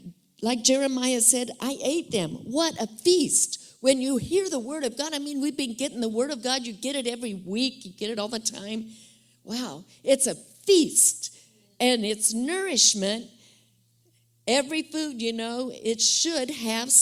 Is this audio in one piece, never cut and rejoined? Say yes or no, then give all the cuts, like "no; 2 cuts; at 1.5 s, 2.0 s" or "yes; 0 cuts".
yes; 0 cuts